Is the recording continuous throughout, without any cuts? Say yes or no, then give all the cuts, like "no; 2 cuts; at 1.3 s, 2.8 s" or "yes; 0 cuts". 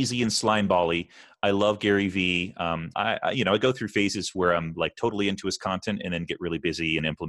no; 1 cut; at 2.9 s